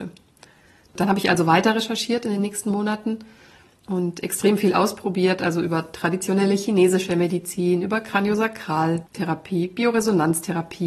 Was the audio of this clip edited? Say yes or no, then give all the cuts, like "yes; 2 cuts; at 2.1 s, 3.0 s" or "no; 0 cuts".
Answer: no; 0 cuts